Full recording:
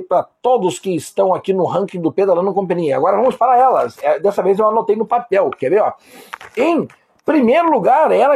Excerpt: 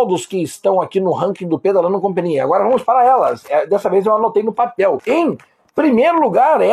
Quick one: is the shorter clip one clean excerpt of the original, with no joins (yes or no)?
no